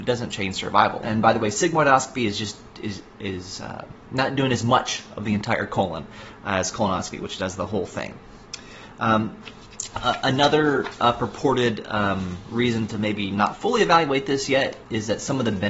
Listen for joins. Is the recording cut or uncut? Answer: cut